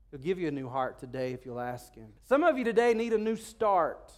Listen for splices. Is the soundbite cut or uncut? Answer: cut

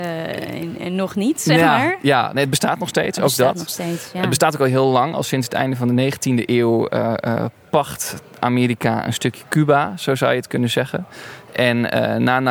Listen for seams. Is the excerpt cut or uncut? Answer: uncut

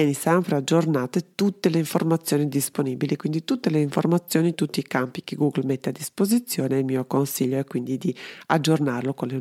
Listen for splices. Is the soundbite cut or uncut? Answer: uncut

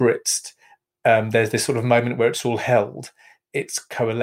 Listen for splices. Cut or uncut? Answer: uncut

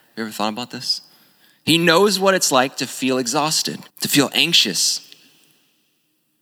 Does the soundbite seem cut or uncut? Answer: cut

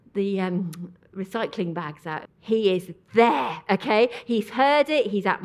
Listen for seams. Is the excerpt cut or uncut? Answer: cut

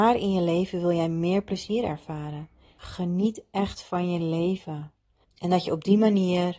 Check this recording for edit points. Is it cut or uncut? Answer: cut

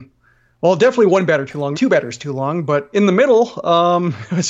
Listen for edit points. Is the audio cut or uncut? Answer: cut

